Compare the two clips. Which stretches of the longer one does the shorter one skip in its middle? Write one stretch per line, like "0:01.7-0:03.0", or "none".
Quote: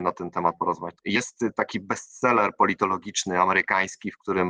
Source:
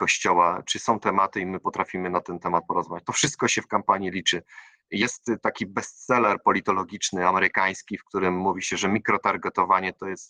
0:03.0-0:04.8